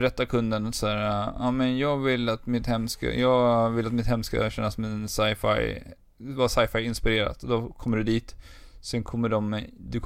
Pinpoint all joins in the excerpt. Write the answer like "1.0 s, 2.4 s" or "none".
none